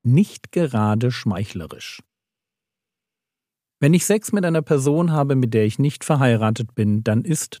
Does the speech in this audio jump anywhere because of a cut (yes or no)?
no